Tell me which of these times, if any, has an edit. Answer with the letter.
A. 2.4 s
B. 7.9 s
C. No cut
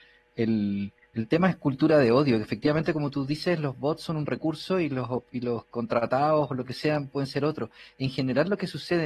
C